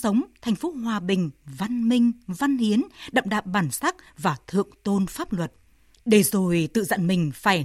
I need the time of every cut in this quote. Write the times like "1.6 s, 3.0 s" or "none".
5.9 s